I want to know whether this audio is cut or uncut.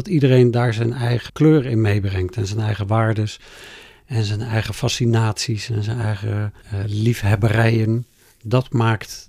cut